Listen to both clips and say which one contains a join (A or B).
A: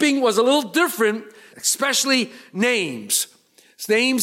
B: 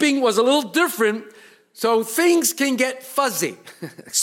A